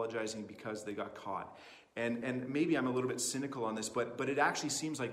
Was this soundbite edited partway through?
no; 0 cuts

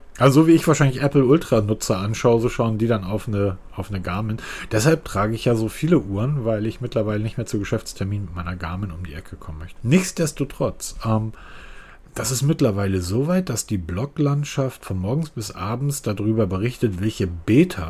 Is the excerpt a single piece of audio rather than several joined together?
no; 1 cut; at 9.8 s

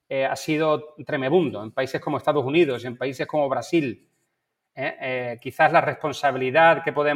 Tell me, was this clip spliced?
no; 0 cuts

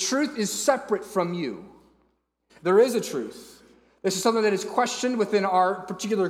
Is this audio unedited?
no; 1 cut; at 2.5 s

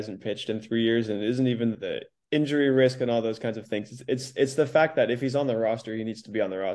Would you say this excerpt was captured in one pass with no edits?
no; 1 cut; at 1.7 s

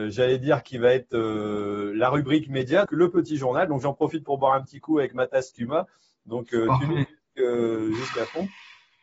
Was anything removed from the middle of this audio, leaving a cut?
yes; 1 cut; at 2.9 s

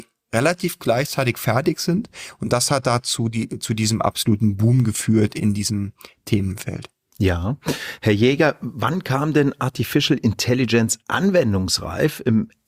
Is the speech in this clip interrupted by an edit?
no; 0 cuts

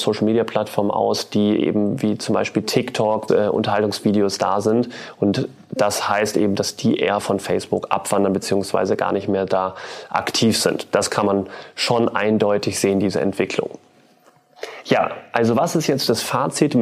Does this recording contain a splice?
yes; 1 cut; at 3.3 s

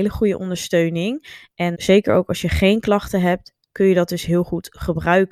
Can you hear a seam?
yes; 1 cut; at 1.7 s

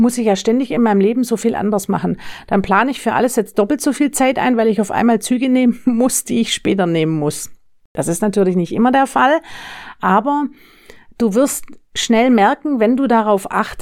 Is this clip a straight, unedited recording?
yes; 0 cuts

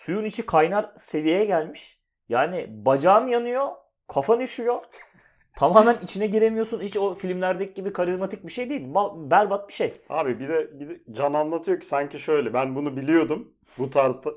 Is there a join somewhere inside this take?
no; 0 cuts

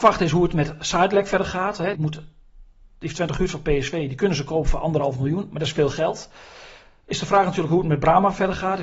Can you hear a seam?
yes; 1 cut; at 1.9 s

